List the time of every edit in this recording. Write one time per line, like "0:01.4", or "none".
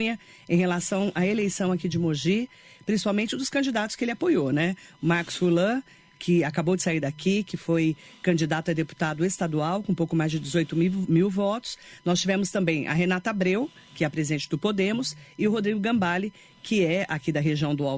none